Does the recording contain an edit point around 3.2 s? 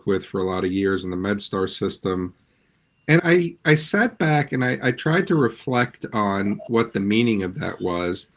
yes; 1 cut; at 3.2 s

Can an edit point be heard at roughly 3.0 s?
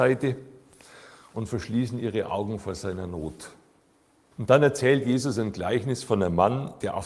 no; 1 cut; at 4.3 s

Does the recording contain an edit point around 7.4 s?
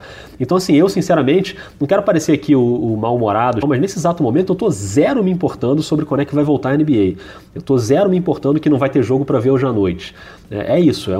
no; 1 cut; at 3.6 s

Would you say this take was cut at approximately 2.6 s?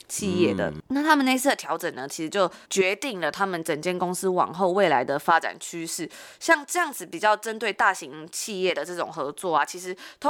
yes; 1 cut; at 2.6 s

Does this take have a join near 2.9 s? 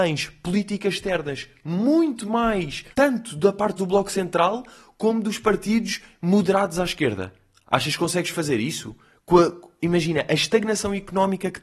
yes; 1 cut; at 2.9 s

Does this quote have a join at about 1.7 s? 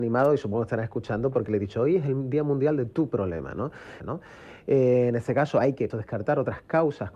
no; 2 cuts; at 4.0 s, 5.9 s

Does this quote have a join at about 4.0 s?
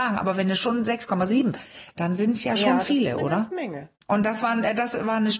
yes; 1 cut; at 4.0 s

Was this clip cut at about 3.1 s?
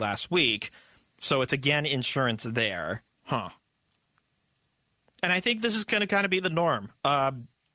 yes; 1 cut; at 3.1 s

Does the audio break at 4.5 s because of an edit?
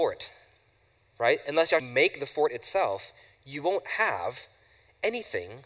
no; 1 cut; at 1.8 s

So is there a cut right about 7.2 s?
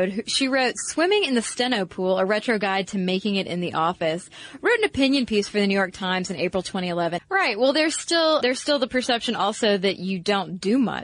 yes; 2 cuts; at 7.2 s, 8.4 s

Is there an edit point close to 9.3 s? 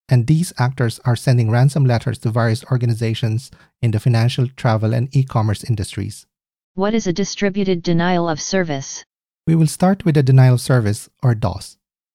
no; 1 cut; at 6.5 s

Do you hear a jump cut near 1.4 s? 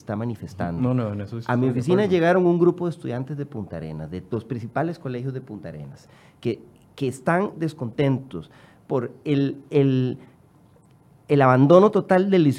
no; 0 cuts

